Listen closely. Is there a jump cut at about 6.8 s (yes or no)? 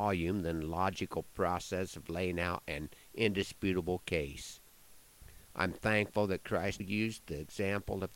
yes